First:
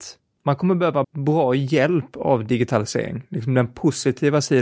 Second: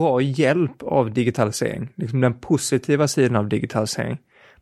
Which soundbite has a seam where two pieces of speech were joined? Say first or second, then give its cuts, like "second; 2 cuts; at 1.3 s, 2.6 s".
first; 1 cut; at 1.0 s